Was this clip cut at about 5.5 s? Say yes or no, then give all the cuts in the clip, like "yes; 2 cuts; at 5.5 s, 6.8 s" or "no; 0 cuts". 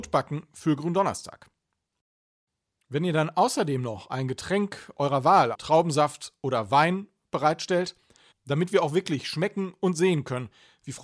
yes; 2 cuts; at 5.5 s, 8.3 s